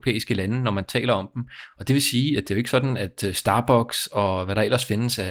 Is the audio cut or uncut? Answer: uncut